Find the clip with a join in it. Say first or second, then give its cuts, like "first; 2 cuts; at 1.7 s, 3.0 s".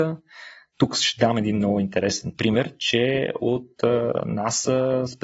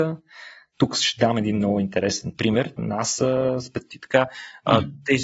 second; 2 cuts; at 2.8 s, 3.9 s